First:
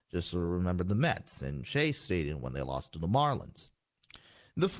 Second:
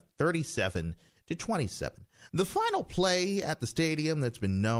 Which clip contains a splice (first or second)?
second